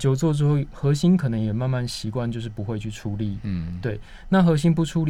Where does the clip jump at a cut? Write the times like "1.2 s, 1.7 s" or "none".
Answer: none

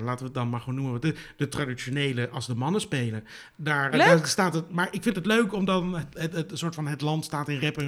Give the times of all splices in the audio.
3.9 s

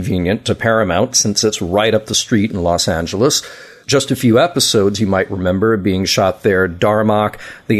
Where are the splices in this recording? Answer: 3.8 s

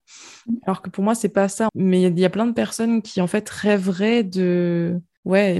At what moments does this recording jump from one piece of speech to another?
1.7 s

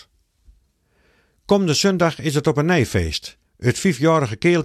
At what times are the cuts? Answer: 3.5 s

